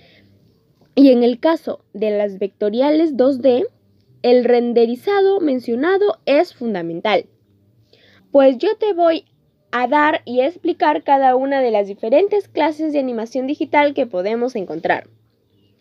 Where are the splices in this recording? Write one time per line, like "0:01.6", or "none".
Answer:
0:08.2

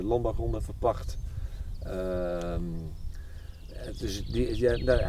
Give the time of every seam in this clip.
none

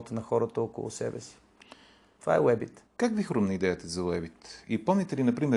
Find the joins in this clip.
0:02.9

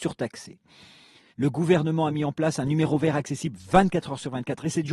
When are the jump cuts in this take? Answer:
0:01.3

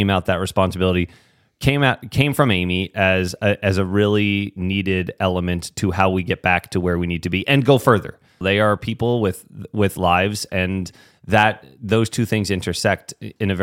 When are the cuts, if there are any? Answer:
0:08.4

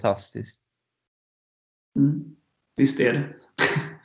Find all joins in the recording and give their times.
none

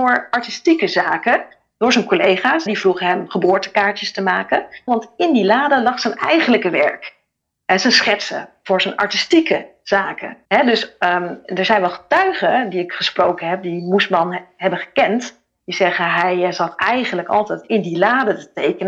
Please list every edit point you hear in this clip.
0:02.7
0:04.9
0:10.4

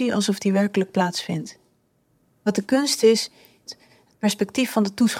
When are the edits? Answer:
0:02.3
0:03.7

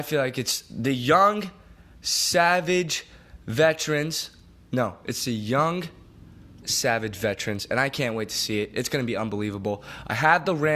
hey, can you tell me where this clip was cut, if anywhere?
0:06.6

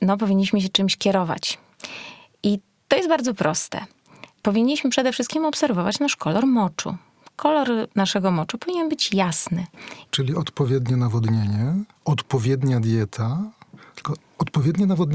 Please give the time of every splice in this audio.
0:10.1
0:11.9

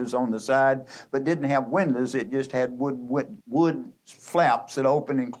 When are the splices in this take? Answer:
0:03.4

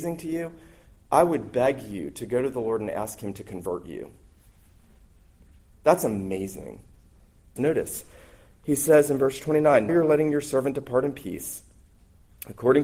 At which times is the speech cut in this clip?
0:07.6
0:09.9

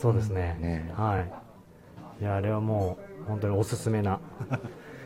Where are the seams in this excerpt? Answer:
none

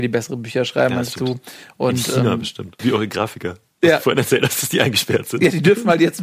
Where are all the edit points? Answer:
0:02.8

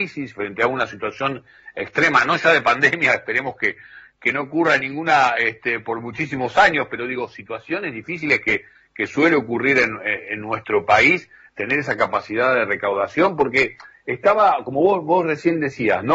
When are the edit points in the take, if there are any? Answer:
none

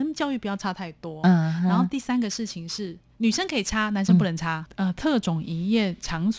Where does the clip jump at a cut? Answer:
0:04.7

